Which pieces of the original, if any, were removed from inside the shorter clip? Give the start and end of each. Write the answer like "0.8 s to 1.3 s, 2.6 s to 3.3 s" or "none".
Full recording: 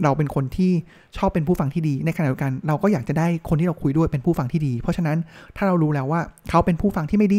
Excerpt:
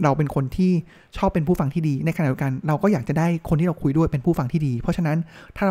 none